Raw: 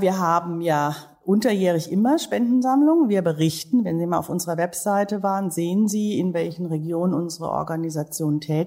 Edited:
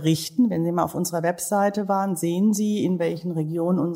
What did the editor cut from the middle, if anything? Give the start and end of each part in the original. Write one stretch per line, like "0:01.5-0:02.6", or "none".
none

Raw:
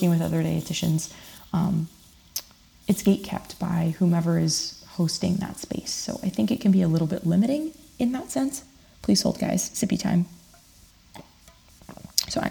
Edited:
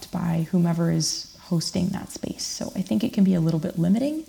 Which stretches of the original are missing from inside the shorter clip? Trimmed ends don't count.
none

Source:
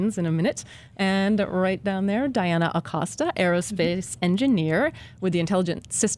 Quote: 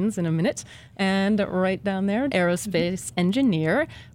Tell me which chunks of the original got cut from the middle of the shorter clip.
0:02.3-0:03.3

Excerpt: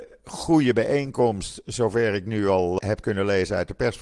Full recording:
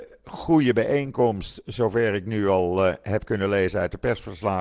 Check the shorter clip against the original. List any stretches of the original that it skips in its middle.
0:02.8-0:03.0

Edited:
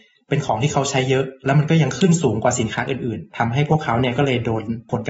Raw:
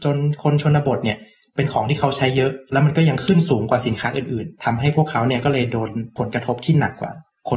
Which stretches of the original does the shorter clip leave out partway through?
none

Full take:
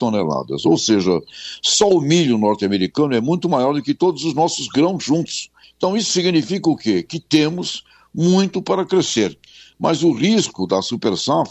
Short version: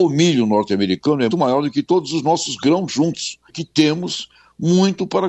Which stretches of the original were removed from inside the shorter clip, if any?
0:03.2-0:03.4
0:05.6-0:07.0

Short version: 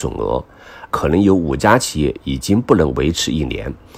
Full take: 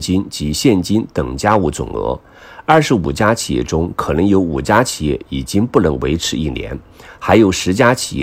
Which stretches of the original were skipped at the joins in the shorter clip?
0:02.7-0:04.0

